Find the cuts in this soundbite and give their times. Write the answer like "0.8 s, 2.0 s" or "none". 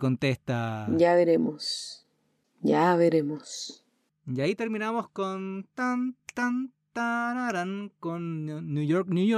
none